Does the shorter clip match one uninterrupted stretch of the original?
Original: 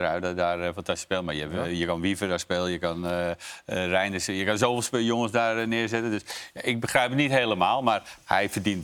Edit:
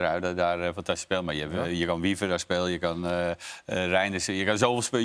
yes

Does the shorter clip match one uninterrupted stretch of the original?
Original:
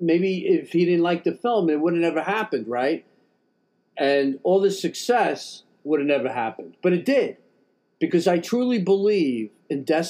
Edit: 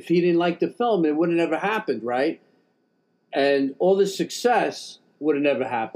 yes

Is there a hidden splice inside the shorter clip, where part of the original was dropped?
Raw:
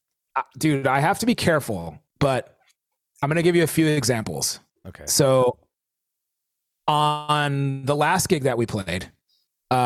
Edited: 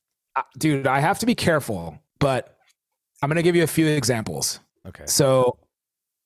no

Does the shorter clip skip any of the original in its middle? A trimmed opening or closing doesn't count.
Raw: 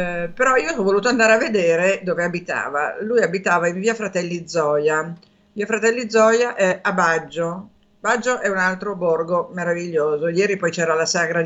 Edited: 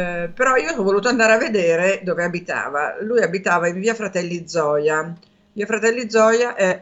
no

